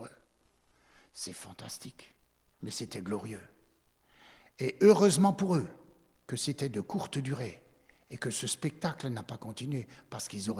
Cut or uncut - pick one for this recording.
cut